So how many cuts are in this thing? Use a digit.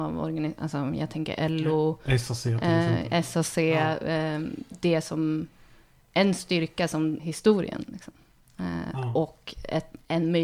1